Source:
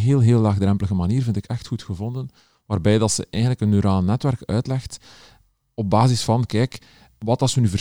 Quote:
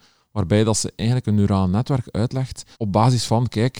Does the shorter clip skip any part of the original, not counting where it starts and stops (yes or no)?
yes